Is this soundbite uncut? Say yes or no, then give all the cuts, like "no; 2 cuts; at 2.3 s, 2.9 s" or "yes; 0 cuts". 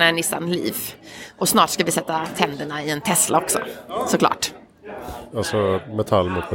no; 1 cut; at 5.3 s